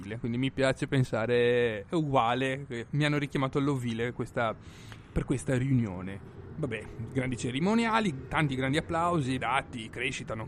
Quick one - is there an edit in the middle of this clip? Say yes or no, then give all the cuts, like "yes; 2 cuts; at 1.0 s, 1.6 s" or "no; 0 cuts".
yes; 2 cuts; at 5.1 s, 9.4 s